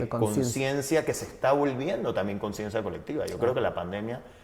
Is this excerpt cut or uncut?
uncut